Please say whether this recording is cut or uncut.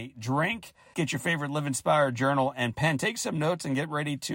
cut